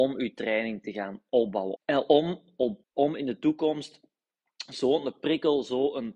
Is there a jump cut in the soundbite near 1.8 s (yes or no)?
yes